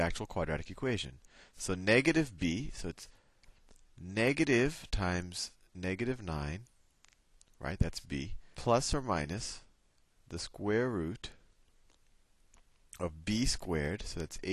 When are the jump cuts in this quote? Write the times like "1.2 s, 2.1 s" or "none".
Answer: 8.5 s